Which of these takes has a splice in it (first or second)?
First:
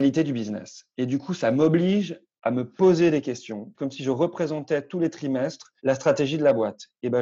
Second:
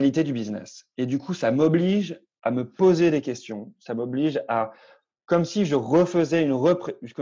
first